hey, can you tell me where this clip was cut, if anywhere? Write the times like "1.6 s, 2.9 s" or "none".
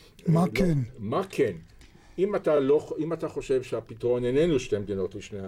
none